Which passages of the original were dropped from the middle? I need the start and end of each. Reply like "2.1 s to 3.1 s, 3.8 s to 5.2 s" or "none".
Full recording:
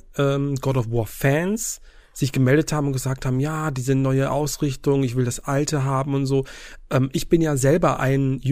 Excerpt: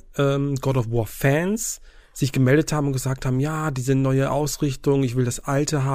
none